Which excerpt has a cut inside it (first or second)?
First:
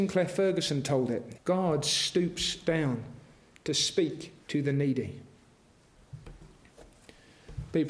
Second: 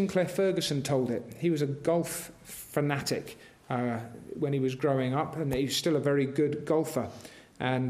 first